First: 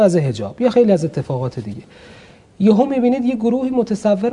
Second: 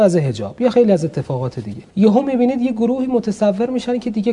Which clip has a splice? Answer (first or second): second